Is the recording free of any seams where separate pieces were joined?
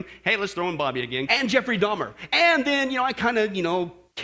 no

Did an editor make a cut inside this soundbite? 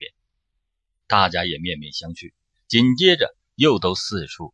yes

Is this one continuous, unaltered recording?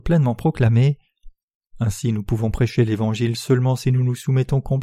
no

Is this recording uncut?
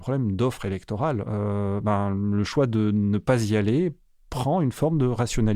no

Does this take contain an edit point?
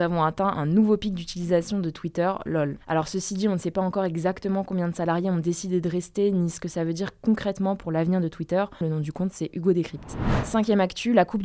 yes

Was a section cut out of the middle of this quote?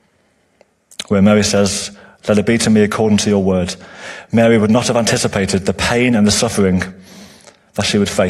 no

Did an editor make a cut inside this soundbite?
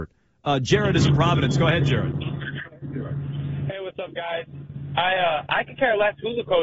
no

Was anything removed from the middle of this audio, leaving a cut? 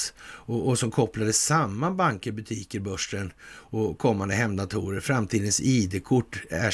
no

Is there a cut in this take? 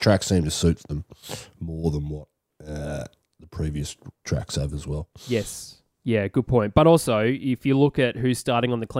no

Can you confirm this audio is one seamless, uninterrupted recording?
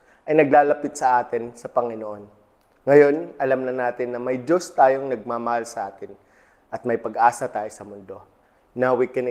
yes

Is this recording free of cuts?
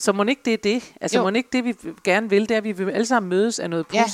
yes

